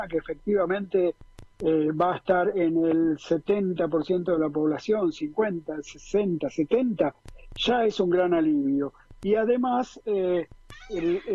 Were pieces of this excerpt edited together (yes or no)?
no